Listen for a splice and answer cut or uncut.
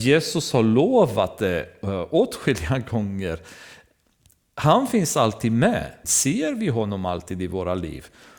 cut